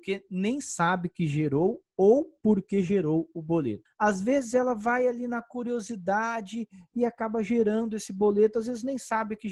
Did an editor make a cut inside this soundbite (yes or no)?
yes